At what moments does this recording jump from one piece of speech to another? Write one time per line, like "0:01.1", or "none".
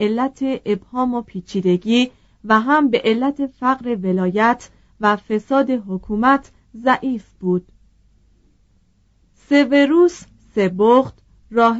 none